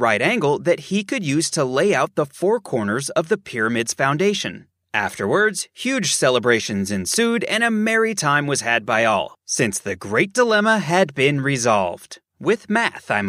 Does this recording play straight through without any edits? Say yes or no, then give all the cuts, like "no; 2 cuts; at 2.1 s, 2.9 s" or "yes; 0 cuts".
yes; 0 cuts